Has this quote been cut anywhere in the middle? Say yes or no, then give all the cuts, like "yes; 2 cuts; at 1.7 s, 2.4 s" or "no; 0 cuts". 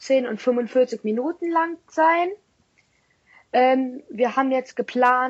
no; 0 cuts